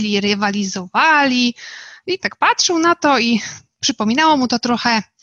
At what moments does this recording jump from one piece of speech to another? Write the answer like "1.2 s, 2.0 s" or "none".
2.2 s

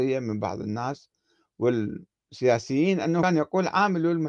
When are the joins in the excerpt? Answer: none

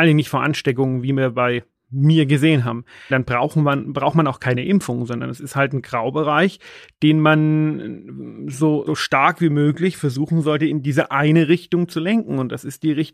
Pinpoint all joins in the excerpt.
3.1 s, 8.9 s

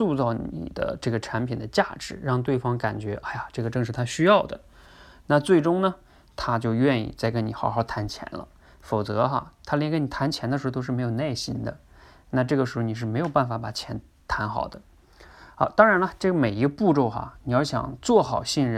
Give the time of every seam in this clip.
none

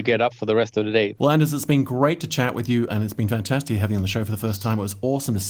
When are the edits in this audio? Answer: 1.1 s, 2.9 s

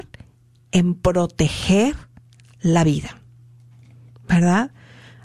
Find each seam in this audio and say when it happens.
none

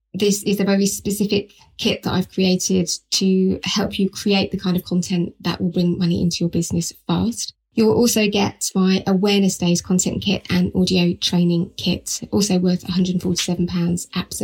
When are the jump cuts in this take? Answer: none

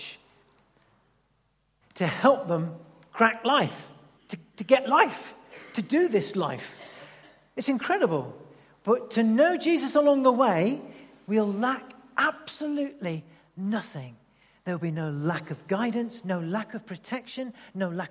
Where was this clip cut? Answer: 4.2 s, 16.2 s

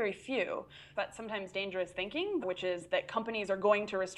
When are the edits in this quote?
1.0 s, 2.4 s

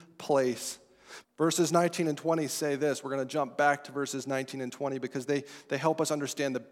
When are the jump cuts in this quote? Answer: 1.2 s

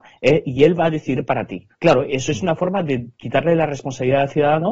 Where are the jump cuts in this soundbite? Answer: 1.7 s

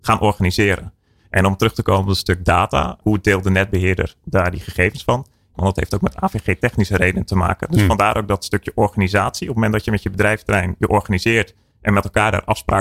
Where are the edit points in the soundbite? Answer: 3.0 s, 5.5 s

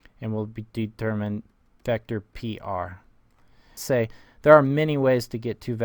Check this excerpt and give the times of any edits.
3.8 s

